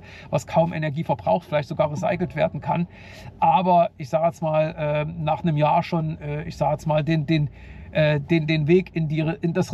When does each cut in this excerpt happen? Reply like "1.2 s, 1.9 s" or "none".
none